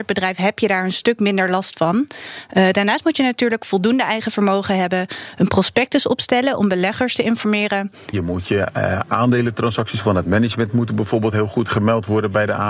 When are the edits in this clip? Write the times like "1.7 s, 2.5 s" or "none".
8.1 s